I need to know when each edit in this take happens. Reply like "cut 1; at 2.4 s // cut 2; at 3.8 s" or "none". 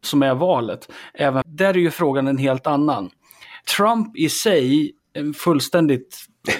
cut 1; at 1.4 s